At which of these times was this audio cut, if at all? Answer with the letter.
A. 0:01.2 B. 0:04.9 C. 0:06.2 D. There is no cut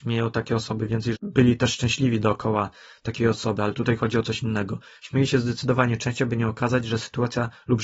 A